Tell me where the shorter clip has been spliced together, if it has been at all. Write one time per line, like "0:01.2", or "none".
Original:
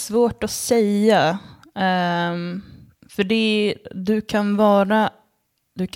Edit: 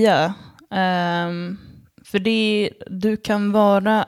none